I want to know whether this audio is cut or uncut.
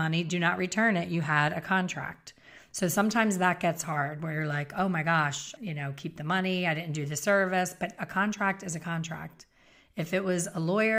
cut